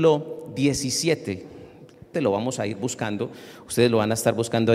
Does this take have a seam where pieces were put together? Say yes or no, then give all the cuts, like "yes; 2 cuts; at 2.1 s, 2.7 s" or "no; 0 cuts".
yes; 1 cut; at 2.1 s